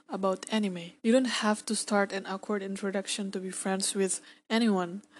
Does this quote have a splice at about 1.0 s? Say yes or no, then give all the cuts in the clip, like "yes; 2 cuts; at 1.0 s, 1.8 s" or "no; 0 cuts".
yes; 1 cut; at 1.0 s